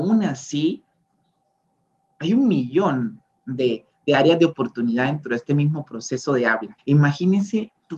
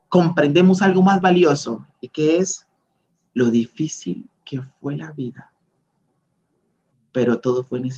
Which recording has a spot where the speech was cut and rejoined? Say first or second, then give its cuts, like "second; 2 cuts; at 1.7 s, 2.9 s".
first; 1 cut; at 6.8 s